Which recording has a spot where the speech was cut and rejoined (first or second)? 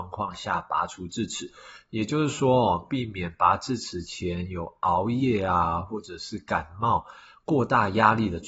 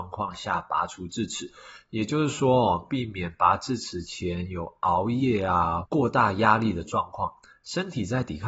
second